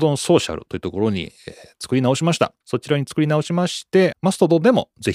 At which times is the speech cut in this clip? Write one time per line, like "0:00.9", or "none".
0:02.6
0:04.1